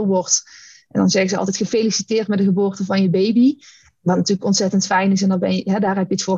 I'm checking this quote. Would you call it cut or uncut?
uncut